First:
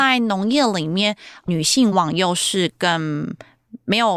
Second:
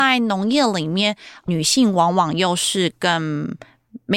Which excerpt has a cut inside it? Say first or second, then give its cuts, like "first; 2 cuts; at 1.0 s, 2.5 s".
first; 1 cut; at 1.9 s